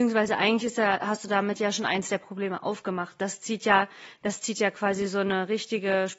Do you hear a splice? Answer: no; 0 cuts

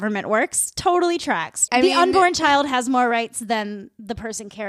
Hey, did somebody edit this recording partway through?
yes; 1 cut; at 1.7 s

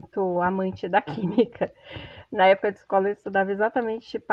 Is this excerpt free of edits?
yes; 0 cuts

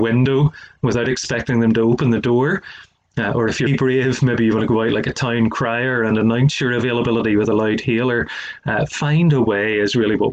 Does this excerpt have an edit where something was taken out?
yes; 1 cut; at 3.7 s

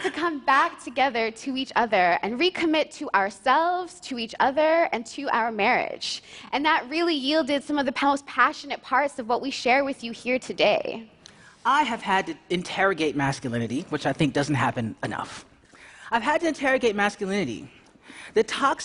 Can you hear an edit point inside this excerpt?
no; 0 cuts

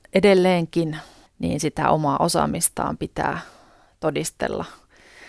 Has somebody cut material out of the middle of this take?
yes; 1 cut; at 1.3 s

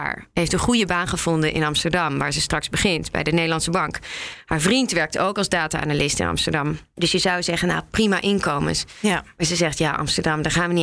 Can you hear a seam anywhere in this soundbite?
no; 0 cuts

